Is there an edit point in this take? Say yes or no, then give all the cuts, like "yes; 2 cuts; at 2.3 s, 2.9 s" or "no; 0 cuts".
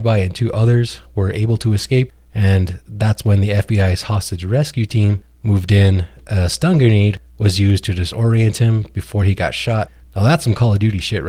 no; 0 cuts